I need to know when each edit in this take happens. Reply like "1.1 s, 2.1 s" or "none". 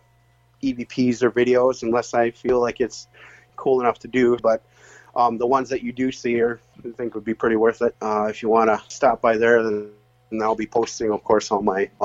4.4 s, 7.9 s